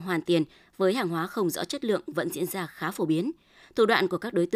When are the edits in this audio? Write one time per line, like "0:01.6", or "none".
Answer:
none